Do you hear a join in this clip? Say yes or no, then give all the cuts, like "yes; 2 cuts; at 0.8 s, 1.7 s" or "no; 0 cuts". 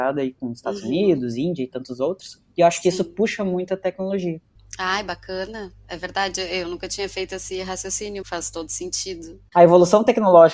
yes; 2 cuts; at 8.2 s, 9.5 s